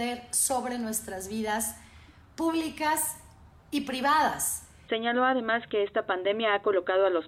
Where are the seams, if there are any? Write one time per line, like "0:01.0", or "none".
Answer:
none

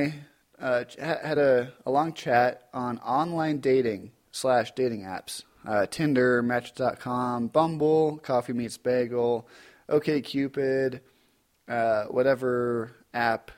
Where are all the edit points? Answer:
none

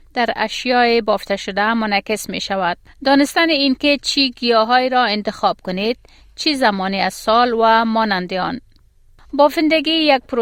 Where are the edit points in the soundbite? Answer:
none

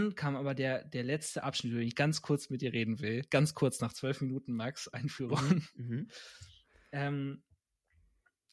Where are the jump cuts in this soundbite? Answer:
none

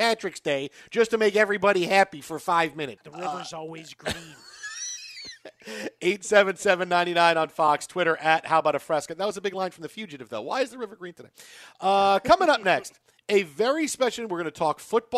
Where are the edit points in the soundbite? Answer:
0:03.0

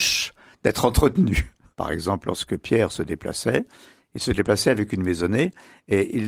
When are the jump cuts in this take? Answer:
0:01.7

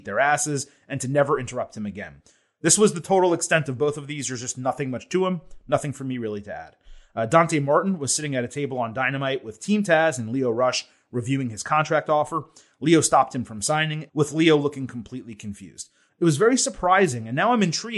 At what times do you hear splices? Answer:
0:14.1
0:16.1

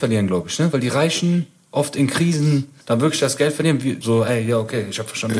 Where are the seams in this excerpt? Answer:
0:02.8
0:04.0

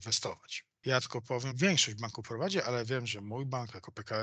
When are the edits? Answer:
0:01.5

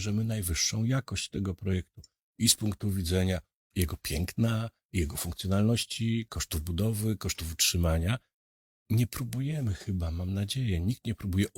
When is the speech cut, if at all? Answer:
0:03.7

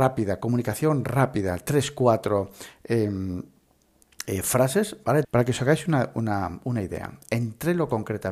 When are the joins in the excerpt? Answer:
0:05.2

